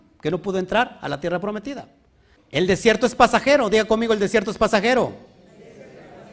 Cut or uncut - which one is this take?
cut